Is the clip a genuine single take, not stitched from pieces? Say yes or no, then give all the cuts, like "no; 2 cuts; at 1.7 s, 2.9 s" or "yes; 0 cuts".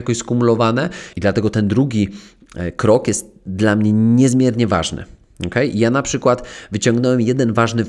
no; 1 cut; at 1.1 s